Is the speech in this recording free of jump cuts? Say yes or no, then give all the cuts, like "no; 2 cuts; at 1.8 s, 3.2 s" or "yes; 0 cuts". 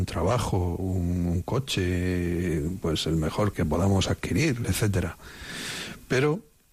no; 2 cuts; at 3.5 s, 4.6 s